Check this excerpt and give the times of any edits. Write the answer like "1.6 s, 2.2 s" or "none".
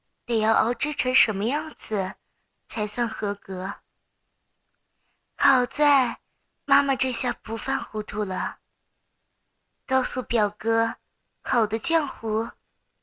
none